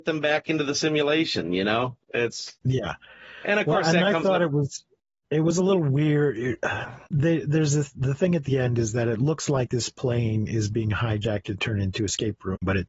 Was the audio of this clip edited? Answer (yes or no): no